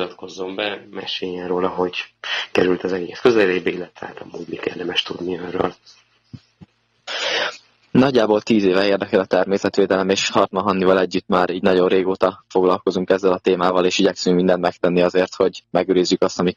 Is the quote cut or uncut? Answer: uncut